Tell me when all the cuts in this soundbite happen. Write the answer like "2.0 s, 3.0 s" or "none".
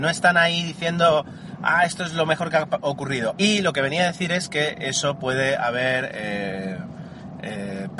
3.4 s

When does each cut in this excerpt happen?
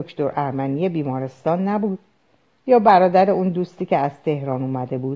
none

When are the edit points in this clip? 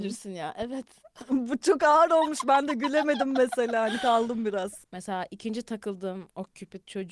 4.8 s

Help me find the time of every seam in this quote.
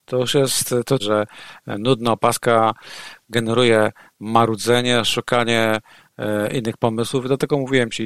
1.0 s

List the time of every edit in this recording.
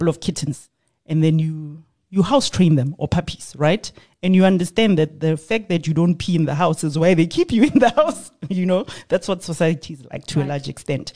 none

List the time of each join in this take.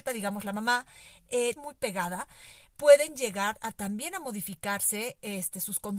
1.6 s

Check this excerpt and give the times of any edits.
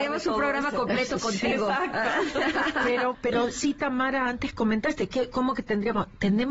3.1 s

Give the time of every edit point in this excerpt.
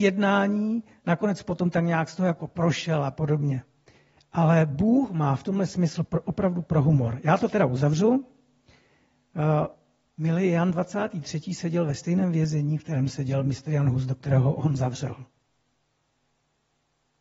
10.0 s

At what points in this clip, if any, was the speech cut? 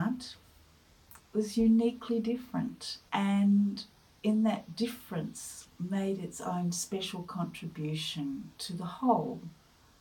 1.2 s, 3.1 s

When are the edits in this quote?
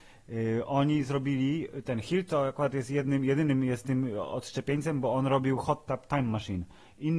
none

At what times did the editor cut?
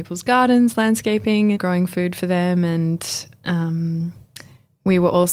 1.5 s

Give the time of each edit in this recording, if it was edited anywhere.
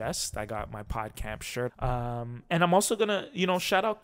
1.7 s

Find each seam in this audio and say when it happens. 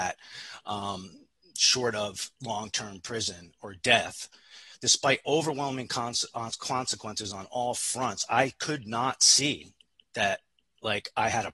none

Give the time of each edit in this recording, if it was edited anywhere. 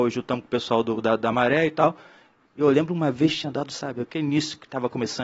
2.5 s

